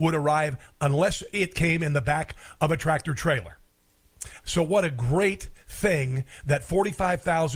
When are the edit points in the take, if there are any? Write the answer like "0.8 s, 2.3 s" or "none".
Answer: 4.4 s